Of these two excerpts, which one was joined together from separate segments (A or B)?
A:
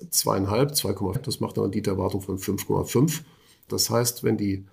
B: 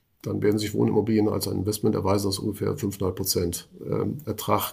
A